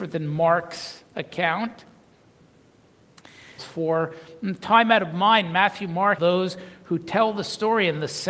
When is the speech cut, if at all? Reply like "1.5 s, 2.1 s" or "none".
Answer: 3.6 s, 6.2 s